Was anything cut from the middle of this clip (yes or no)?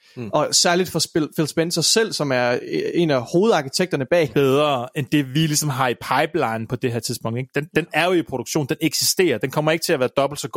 yes